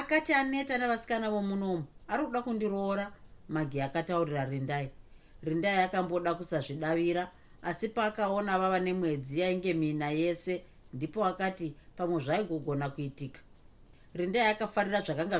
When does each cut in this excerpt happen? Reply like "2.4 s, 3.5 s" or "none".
none